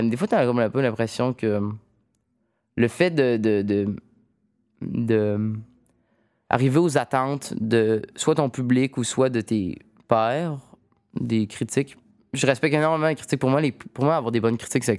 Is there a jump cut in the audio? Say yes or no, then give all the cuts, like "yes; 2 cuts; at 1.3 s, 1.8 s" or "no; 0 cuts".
no; 0 cuts